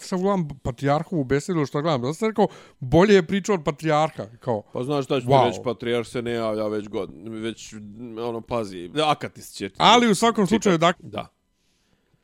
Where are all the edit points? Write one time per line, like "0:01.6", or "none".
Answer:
0:08.9
0:10.9